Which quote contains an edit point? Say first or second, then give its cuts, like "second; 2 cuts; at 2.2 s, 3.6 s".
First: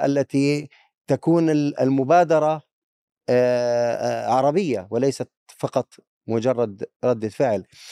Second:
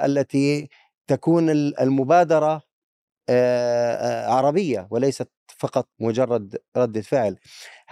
second; 1 cut; at 5.9 s